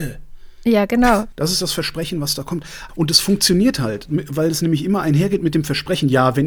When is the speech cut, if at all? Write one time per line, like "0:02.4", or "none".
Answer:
0:01.3
0:02.9